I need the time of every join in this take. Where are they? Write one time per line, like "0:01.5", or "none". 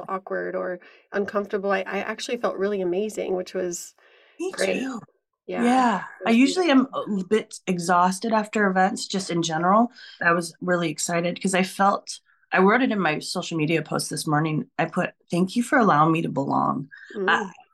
0:10.2